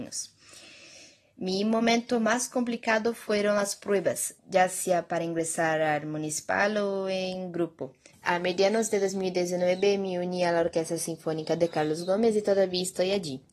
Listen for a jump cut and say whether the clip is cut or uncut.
cut